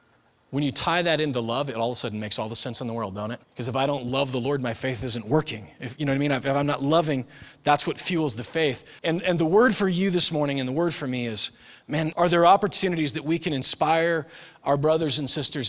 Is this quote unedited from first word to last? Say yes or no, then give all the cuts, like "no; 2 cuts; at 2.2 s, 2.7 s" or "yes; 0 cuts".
no; 3 cuts; at 3.4 s, 9.0 s, 12.1 s